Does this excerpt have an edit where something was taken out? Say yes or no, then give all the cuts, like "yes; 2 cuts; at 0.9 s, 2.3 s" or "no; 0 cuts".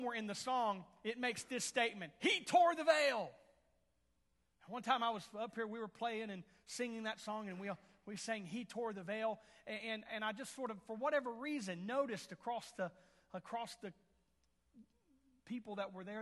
no; 0 cuts